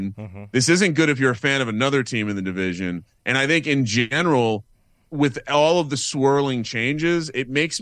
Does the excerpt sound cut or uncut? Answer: uncut